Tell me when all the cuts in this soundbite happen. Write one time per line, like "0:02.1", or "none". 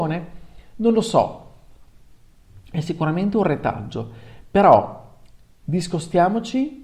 0:02.6